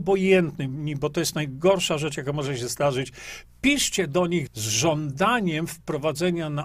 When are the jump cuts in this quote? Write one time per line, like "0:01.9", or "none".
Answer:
0:04.5